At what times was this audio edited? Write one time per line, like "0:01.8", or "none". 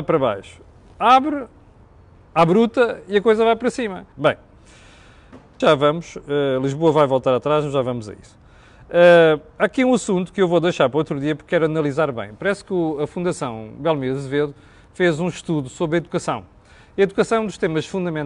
0:04.1
0:05.6

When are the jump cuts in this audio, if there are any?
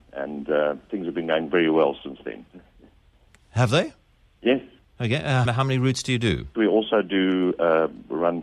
0:05.5
0:06.5

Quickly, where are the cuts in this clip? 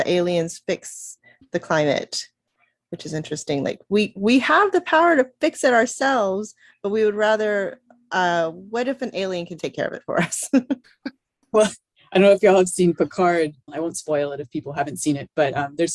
0:09.6
0:10.8
0:13.7

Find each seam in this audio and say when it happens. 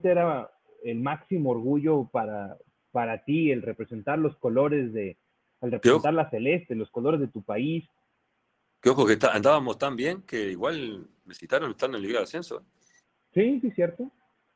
none

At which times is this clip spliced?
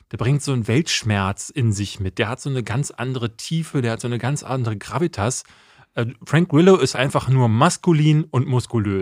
0:06.9

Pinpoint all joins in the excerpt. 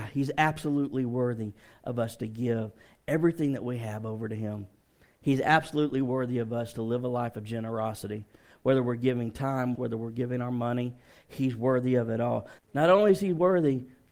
0:09.7
0:12.6

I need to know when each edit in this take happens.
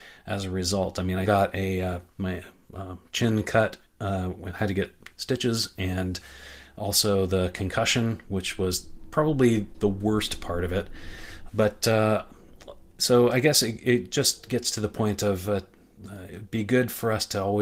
0:01.3
0:11.5

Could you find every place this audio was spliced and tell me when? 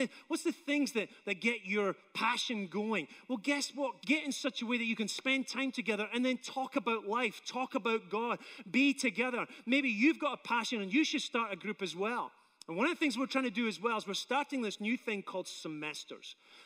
0:04.0

